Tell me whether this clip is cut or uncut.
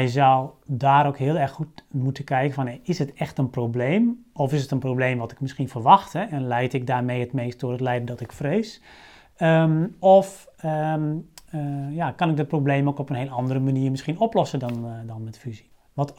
uncut